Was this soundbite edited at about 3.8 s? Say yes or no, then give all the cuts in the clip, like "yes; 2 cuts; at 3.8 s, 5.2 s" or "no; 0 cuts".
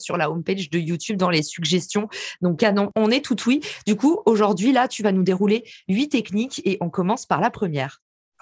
no; 0 cuts